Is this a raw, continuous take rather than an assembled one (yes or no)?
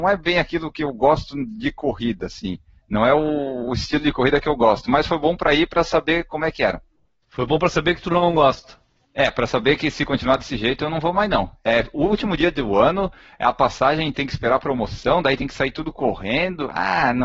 yes